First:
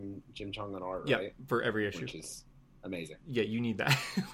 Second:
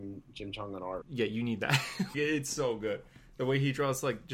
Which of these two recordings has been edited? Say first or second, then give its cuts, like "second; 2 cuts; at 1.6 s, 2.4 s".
second; 2 cuts; at 1.0 s, 2.1 s